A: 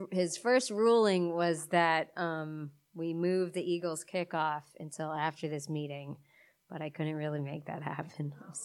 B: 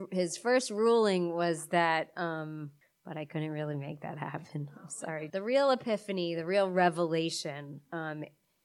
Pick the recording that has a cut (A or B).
B